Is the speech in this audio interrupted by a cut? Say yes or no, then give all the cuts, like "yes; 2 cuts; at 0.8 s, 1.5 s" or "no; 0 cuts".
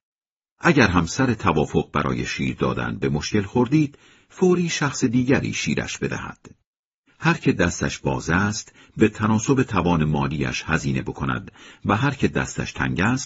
yes; 1 cut; at 7.1 s